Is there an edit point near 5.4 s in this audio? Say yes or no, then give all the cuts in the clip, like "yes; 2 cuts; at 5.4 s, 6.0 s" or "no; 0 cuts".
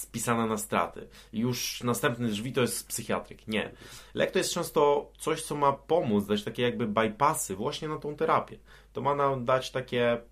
no; 0 cuts